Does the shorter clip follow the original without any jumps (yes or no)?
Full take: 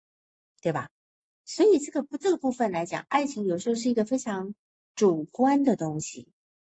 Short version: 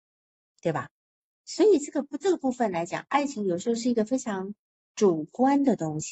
yes